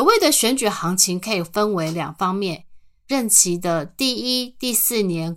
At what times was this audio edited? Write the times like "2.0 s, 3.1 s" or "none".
3.1 s